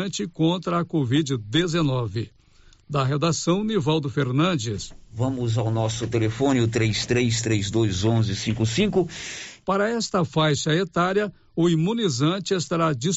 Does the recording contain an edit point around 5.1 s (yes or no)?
yes